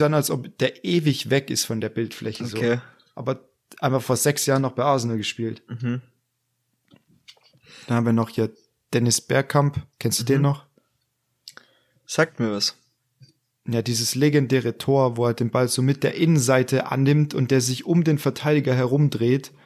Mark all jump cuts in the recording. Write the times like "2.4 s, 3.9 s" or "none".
9.9 s